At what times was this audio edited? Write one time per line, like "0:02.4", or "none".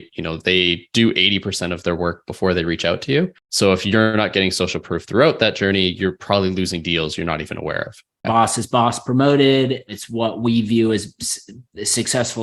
0:03.4
0:08.2